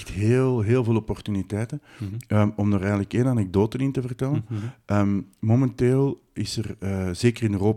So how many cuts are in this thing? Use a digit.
0